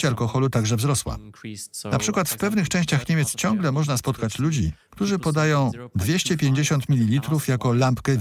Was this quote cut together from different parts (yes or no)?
no